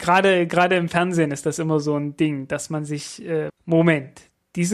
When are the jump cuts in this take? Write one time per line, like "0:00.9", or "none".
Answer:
0:03.5